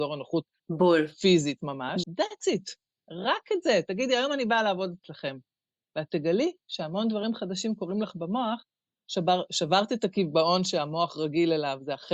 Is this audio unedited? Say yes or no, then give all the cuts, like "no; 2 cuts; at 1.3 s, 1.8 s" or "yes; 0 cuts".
no; 1 cut; at 2.0 s